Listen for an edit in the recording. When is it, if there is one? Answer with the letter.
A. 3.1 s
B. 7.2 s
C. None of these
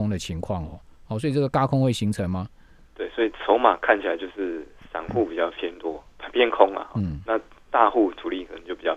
C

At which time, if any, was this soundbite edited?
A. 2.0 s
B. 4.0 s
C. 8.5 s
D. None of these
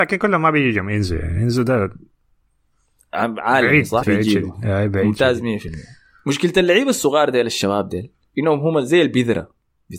B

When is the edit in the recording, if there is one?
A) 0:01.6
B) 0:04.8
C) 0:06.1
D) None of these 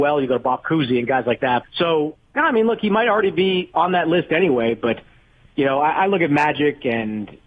A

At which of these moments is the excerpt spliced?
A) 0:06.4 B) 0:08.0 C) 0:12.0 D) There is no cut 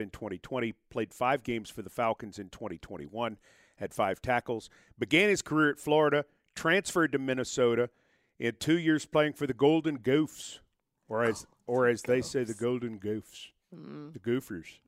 D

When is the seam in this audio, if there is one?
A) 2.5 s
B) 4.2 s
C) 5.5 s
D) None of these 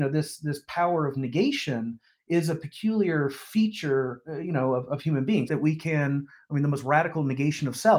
C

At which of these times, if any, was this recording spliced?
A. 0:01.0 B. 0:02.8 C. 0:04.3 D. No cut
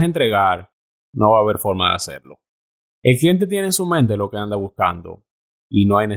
A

